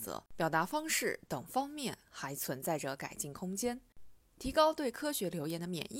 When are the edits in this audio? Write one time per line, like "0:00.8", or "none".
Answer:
0:04.2